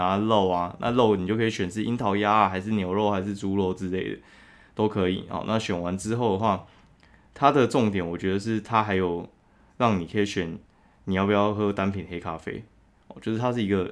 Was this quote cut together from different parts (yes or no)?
no